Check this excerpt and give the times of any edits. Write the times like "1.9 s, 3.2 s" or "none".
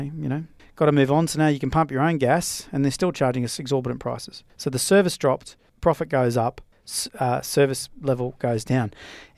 none